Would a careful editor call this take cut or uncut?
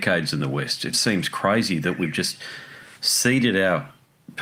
cut